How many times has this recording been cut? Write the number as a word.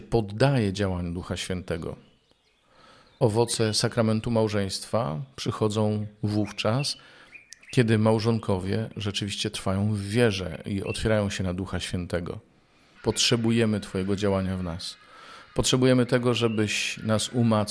one